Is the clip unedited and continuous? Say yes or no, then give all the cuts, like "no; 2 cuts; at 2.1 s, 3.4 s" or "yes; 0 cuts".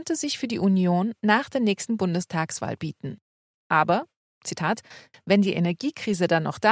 no; 2 cuts; at 3.5 s, 5.1 s